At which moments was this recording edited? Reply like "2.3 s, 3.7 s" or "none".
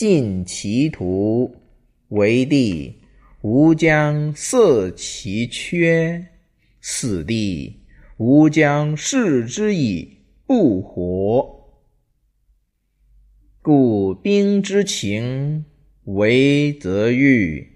none